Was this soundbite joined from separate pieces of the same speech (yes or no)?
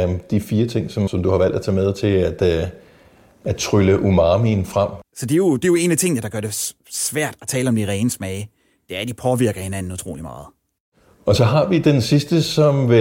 yes